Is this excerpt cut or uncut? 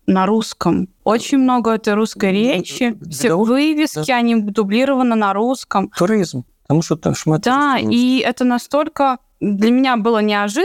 uncut